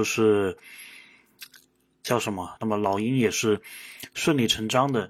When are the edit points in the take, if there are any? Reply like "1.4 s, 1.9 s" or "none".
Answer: 2.6 s